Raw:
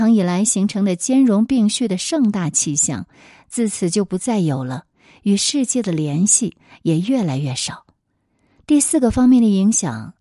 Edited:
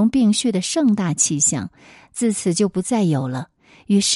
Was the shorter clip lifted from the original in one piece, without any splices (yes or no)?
yes